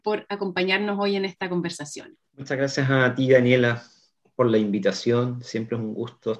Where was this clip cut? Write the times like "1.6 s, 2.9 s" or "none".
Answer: 2.3 s